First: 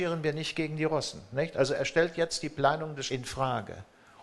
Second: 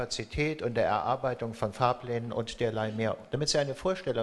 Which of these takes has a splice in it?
first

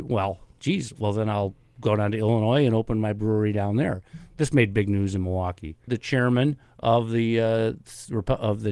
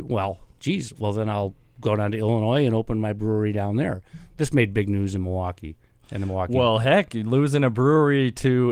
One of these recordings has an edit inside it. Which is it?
first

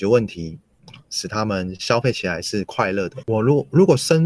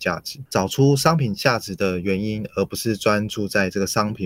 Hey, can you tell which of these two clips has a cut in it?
first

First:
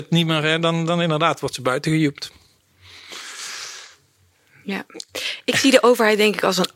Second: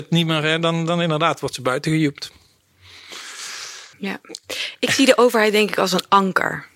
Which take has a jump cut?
second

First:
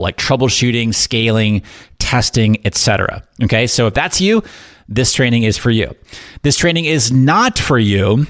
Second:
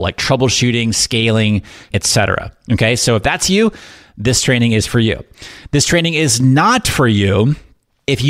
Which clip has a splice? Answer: second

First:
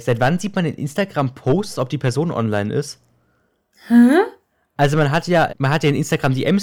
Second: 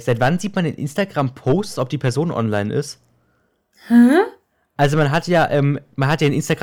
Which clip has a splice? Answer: first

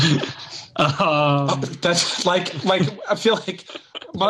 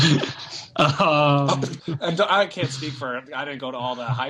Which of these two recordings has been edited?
second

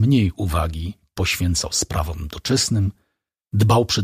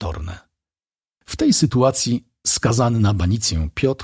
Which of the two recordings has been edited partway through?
second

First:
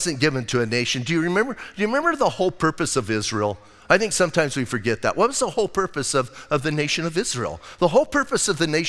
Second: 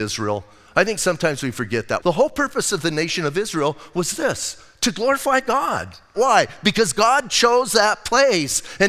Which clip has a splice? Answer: second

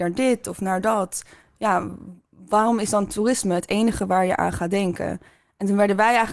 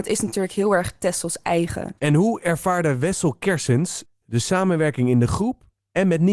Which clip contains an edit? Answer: second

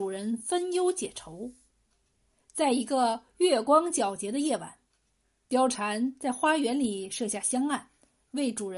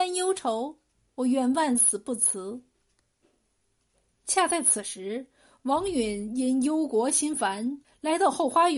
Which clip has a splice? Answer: second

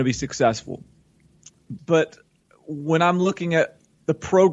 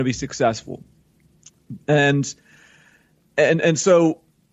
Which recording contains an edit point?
first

